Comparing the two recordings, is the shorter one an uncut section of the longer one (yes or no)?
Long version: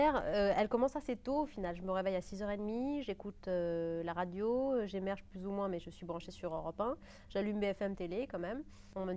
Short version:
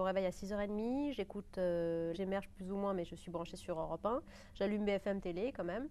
no